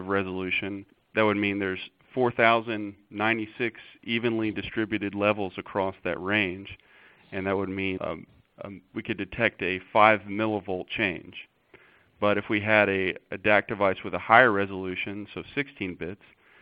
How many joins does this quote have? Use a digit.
1